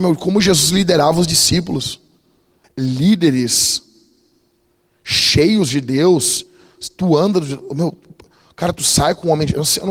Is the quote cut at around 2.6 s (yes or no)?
yes